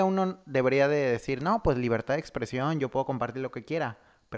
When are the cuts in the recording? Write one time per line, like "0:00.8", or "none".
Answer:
none

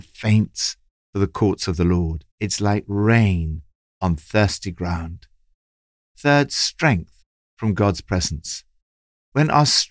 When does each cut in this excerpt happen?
0:02.3

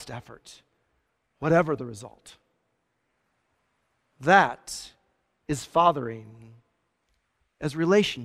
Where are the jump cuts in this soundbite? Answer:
none

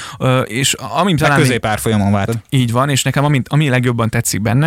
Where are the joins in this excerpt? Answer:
0:02.3

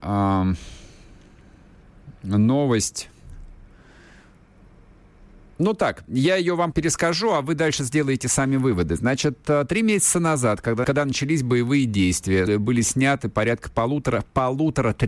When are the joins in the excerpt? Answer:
0:06.7
0:10.8
0:12.5

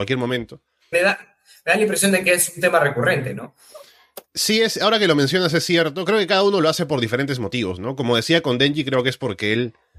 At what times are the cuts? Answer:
0:00.9

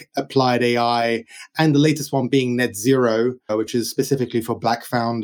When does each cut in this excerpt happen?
0:03.5

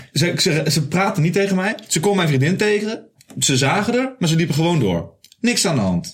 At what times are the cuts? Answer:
none

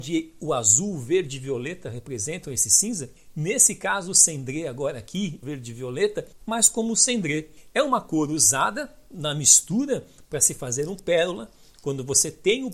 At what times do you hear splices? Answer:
0:05.4

